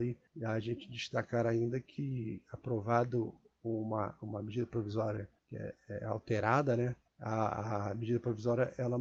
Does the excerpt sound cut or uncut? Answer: uncut